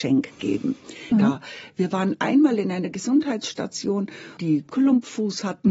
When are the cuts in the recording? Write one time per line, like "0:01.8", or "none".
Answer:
0:01.1
0:04.4